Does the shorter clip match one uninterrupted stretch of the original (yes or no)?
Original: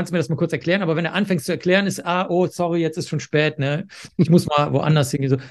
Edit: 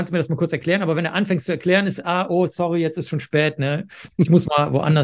yes